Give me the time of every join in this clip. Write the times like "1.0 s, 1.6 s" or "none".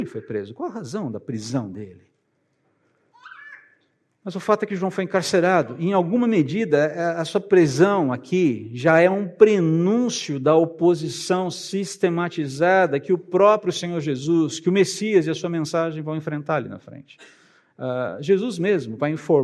none